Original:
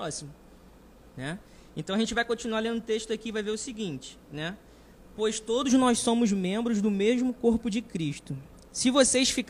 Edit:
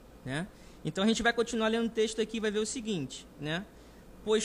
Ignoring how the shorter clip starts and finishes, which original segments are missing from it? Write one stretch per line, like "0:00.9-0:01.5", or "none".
none